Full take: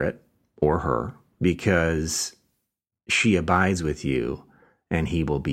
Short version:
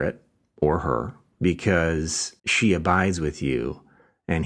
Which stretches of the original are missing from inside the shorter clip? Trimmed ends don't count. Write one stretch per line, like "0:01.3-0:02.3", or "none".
0:02.4-0:03.0